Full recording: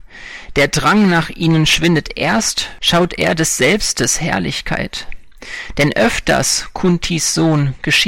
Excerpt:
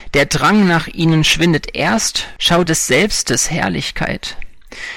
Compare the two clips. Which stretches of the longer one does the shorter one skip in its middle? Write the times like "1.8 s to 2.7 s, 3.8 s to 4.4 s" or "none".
3.1 s to 3.4 s